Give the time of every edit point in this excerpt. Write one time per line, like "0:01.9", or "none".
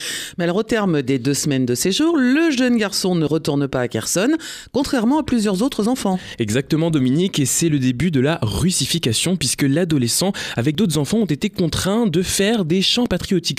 none